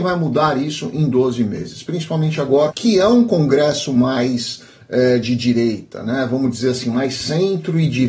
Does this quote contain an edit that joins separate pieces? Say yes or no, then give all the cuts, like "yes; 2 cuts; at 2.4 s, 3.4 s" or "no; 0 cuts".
yes; 1 cut; at 2.7 s